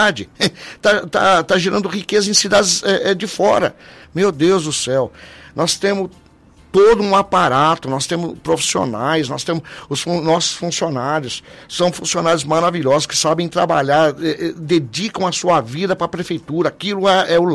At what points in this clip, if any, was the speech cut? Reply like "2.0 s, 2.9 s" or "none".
4.0 s